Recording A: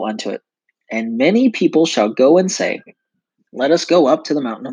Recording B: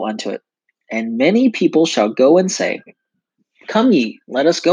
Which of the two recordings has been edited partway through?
A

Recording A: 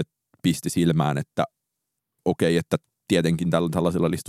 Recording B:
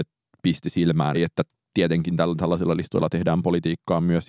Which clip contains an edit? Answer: B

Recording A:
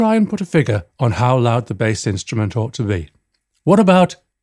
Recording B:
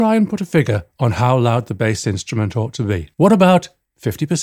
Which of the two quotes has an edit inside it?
B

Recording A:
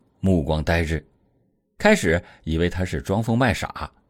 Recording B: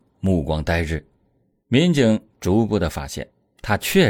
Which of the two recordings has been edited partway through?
B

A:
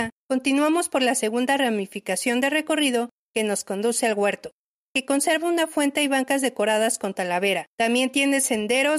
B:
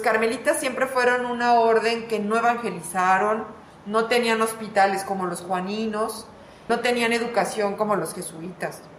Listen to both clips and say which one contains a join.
A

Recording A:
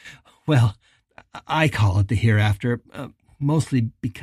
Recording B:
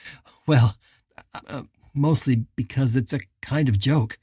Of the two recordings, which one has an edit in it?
B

